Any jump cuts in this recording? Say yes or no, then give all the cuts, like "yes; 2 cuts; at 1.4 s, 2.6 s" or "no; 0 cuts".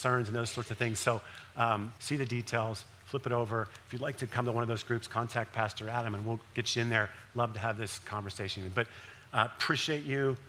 yes; 1 cut; at 2.0 s